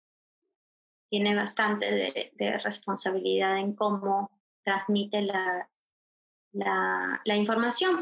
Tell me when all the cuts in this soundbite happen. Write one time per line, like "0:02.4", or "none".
0:04.5